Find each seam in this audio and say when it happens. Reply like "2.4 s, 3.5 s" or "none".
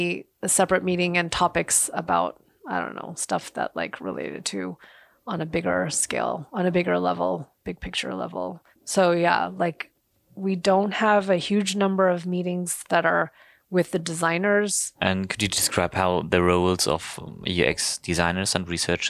8.8 s